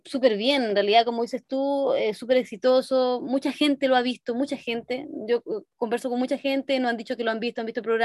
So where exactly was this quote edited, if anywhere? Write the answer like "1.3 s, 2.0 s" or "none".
none